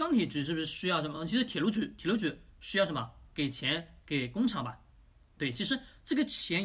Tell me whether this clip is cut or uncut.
uncut